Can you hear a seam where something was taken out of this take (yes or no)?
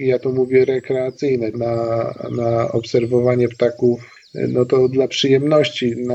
yes